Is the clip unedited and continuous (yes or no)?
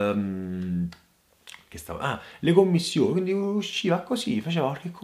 yes